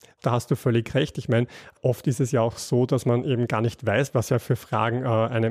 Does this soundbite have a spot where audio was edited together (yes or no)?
no